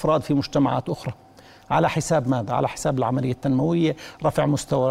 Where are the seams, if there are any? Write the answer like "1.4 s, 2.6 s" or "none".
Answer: none